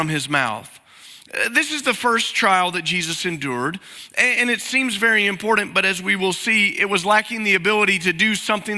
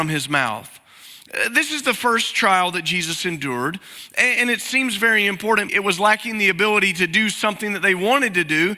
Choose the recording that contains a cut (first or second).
second